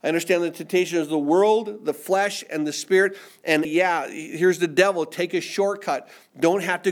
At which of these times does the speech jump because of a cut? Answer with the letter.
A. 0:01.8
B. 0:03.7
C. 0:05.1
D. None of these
B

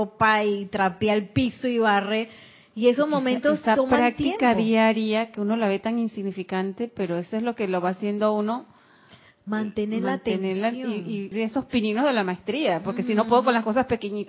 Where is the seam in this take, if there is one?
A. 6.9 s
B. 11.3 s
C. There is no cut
B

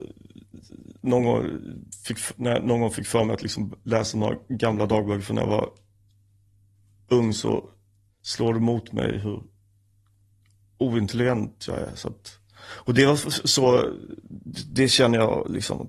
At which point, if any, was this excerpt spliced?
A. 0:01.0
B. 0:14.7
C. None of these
C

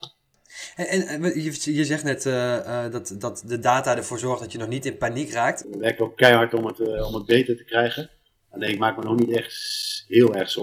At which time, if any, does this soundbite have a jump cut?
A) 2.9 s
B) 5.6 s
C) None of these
B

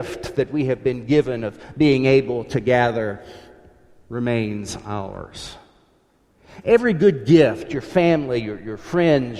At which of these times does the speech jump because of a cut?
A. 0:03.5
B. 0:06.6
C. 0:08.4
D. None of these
D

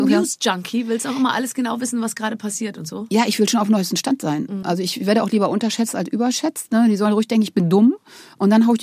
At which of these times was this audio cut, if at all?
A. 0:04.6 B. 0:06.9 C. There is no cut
A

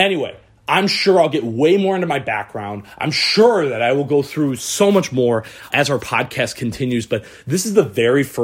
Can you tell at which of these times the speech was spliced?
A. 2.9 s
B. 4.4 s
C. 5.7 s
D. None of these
C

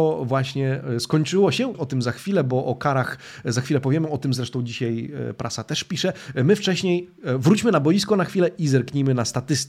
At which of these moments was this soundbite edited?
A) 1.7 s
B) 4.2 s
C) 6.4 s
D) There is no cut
A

